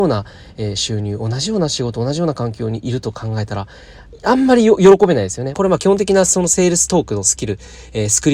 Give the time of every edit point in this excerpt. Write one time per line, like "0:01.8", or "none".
0:05.5